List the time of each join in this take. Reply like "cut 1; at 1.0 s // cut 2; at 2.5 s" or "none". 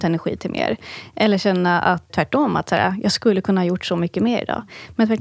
cut 1; at 2.1 s